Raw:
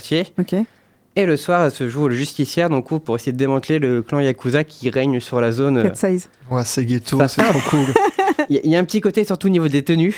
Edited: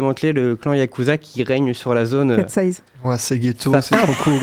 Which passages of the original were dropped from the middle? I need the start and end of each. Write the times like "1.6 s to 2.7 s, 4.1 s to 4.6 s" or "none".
none